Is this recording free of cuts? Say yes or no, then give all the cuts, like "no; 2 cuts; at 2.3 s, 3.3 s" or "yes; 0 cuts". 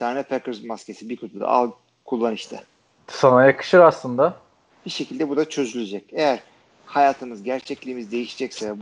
no; 1 cut; at 4.7 s